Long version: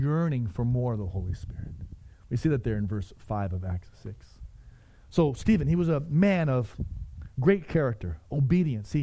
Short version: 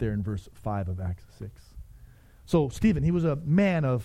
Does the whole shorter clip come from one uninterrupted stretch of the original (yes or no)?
yes